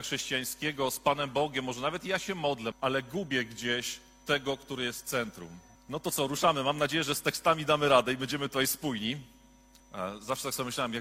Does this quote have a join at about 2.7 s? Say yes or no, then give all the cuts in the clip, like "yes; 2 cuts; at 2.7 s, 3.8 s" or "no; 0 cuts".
yes; 3 cuts; at 2.7 s, 5.8 s, 9.8 s